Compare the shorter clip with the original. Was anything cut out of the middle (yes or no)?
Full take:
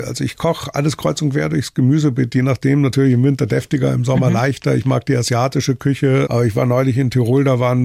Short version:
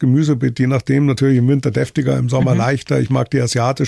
no